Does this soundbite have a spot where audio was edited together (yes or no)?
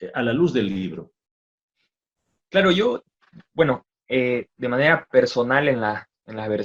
no